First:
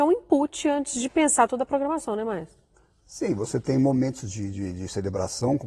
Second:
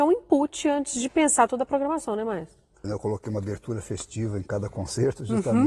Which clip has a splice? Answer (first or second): second